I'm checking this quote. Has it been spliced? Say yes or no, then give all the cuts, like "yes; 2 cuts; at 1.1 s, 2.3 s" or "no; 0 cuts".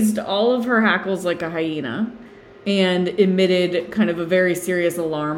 no; 0 cuts